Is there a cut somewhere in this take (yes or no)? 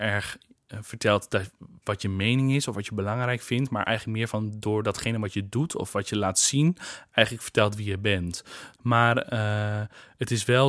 yes